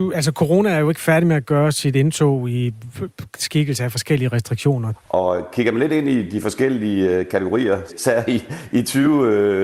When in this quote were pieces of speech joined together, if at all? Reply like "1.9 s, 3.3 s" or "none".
4.9 s, 7.9 s